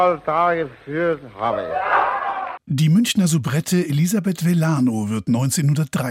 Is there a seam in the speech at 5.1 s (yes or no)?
no